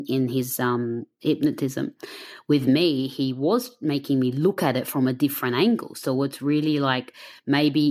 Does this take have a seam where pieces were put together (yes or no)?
no